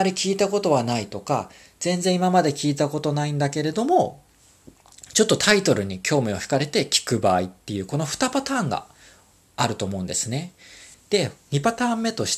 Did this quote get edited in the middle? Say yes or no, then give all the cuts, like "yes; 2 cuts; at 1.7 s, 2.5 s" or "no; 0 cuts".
yes; 1 cut; at 10.9 s